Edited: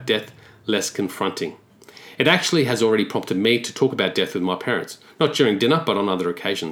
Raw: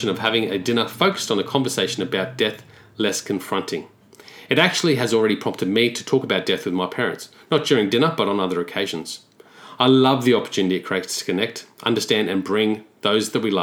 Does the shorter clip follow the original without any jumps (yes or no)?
yes